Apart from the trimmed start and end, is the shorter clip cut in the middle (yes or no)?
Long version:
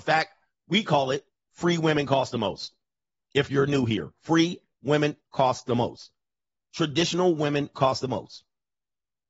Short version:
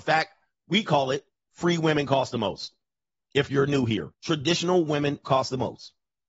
yes